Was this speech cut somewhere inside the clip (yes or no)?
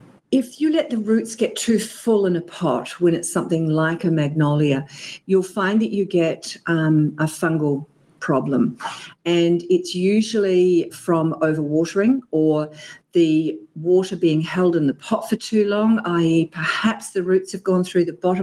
yes